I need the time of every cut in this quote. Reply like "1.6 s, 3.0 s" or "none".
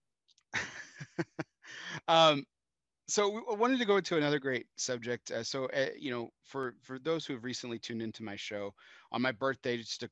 none

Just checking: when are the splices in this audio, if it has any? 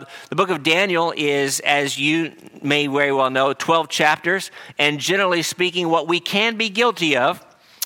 none

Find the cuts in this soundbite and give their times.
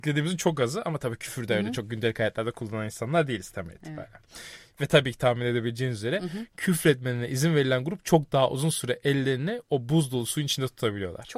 4.7 s

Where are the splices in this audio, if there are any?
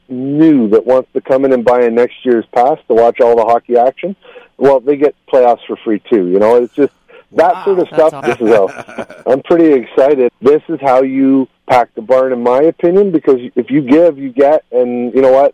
8.2 s, 10.3 s, 11.6 s

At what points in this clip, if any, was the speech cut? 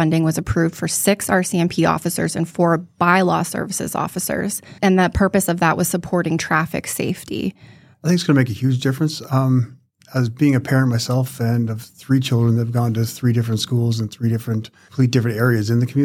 7.9 s

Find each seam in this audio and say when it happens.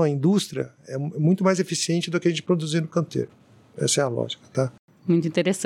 none

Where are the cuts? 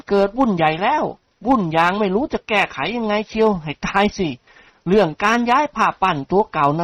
none

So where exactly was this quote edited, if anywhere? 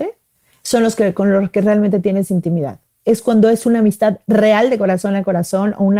none

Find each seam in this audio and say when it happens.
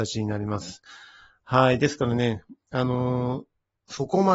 none

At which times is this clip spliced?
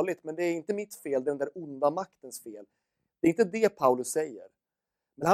none

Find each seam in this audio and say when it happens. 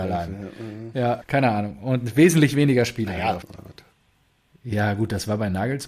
1.2 s, 3.4 s

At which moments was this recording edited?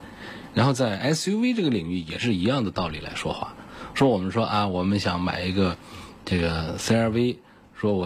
none

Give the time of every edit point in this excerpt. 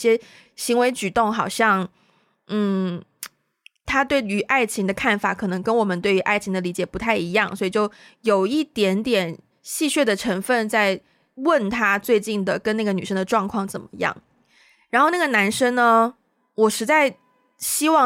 none

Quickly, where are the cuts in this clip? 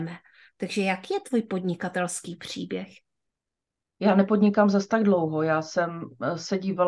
none

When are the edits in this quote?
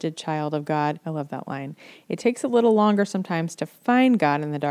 1.0 s

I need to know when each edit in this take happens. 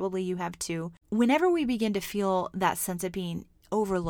1.0 s

